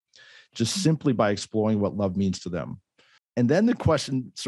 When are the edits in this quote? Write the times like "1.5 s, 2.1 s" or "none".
3.2 s